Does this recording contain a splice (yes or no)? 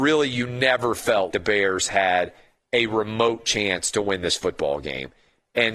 yes